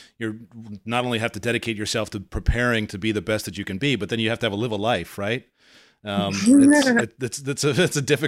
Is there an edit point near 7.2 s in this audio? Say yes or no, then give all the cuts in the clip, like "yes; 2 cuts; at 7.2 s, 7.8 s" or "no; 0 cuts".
no; 0 cuts